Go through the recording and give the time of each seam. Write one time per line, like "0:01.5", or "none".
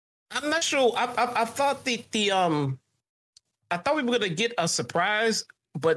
none